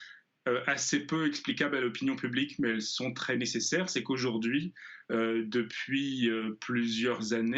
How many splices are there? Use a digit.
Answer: 0